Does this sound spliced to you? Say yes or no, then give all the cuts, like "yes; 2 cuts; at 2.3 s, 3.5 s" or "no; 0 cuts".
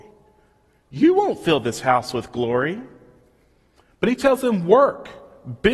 no; 0 cuts